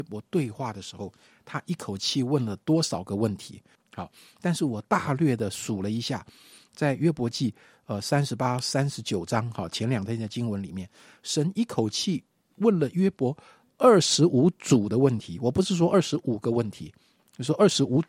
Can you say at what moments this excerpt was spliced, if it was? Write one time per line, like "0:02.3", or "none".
0:03.8

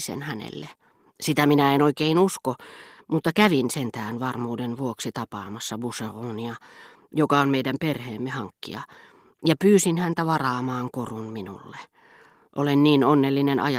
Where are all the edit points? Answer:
none

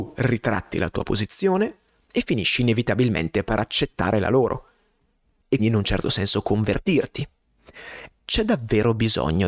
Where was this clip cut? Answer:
0:05.6
0:08.1

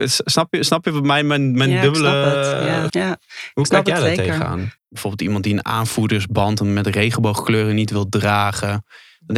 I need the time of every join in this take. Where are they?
0:02.9
0:04.8

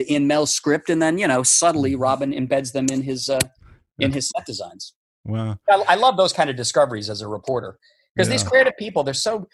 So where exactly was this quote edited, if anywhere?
none

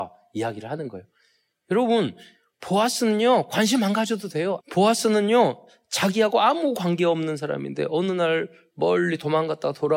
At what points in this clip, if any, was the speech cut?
0:04.6

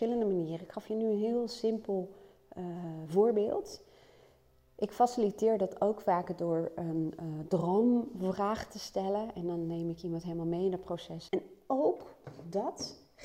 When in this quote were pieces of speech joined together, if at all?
0:11.3

